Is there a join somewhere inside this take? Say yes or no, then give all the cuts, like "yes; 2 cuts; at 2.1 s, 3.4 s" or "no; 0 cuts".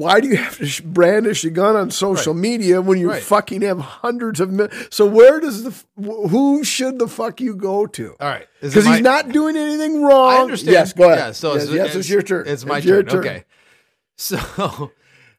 no; 0 cuts